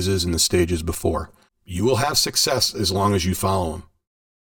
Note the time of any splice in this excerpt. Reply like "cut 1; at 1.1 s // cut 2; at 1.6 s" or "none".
cut 1; at 1.5 s

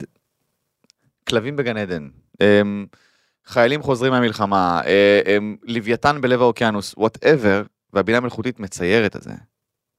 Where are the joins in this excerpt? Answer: none

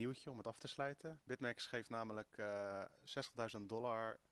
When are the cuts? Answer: cut 1; at 1.2 s

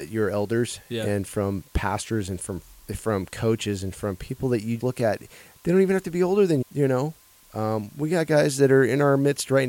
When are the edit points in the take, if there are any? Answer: cut 1; at 4.8 s // cut 2; at 6.6 s

